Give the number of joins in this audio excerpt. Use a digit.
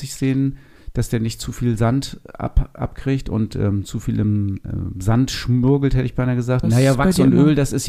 1